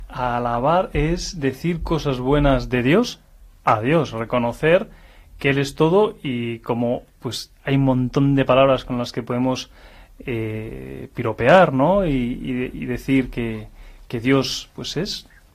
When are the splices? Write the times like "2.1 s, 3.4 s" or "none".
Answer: none